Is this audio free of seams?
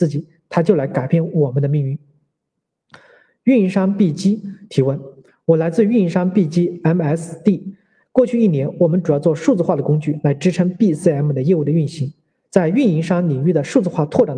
yes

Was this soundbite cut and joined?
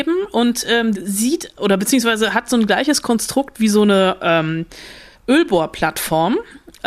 yes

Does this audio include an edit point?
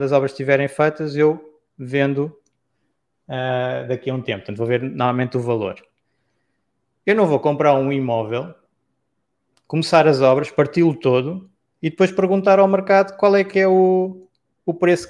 no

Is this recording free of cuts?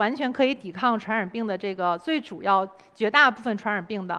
yes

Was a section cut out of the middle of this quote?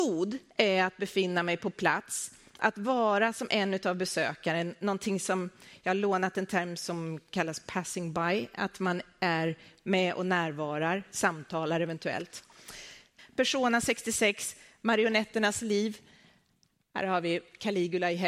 yes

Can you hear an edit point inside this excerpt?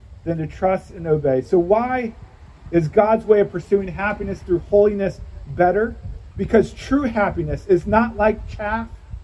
no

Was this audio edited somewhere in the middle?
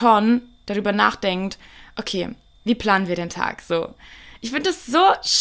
no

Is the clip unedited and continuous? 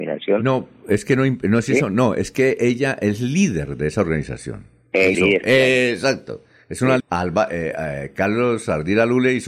no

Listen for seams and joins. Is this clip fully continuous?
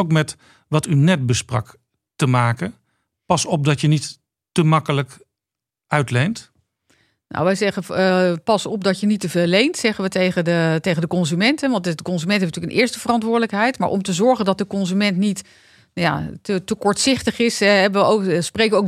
yes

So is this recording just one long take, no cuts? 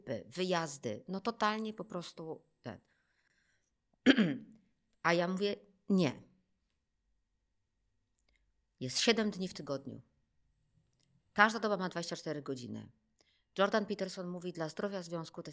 yes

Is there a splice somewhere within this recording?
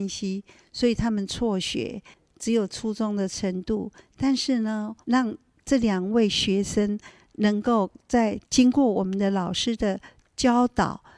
yes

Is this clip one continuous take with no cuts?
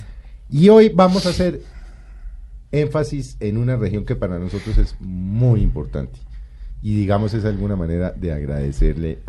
yes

